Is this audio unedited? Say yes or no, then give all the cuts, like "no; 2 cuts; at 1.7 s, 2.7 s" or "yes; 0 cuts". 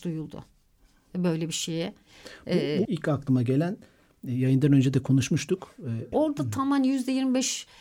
no; 2 cuts; at 2.9 s, 6.1 s